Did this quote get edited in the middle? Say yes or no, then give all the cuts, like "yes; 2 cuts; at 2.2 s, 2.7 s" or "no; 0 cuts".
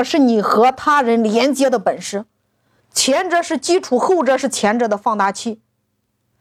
no; 0 cuts